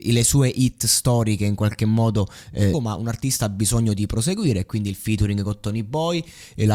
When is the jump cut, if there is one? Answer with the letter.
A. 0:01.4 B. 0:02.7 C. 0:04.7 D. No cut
B